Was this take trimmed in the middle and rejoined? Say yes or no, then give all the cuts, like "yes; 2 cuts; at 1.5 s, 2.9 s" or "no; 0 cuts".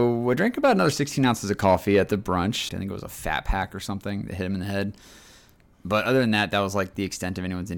yes; 1 cut; at 2.7 s